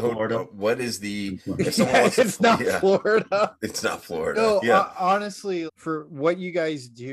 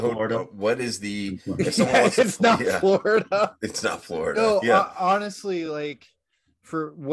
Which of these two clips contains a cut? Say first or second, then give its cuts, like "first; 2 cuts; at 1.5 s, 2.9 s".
first; 1 cut; at 5.7 s